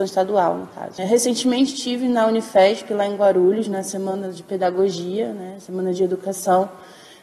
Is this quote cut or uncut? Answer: cut